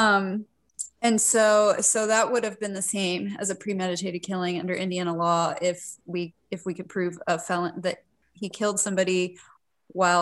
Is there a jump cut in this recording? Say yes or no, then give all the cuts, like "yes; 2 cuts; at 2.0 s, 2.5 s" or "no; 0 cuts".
no; 0 cuts